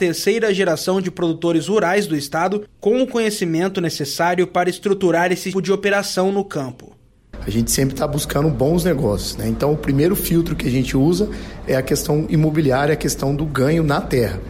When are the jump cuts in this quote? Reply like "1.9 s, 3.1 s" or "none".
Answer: 5.5 s